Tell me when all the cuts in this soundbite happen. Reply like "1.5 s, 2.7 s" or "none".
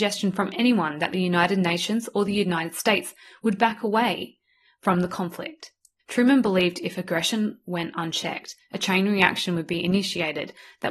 6.0 s